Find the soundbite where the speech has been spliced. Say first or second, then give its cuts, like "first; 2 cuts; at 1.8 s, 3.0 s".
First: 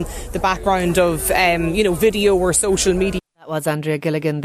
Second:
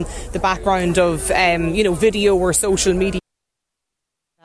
first; 1 cut; at 3.3 s